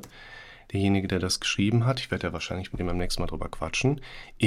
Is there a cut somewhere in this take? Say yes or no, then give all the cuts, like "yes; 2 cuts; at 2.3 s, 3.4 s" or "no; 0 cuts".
no; 0 cuts